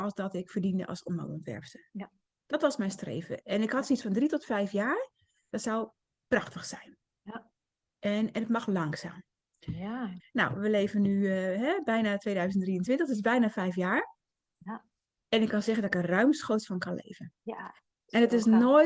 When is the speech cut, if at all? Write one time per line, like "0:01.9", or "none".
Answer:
0:10.2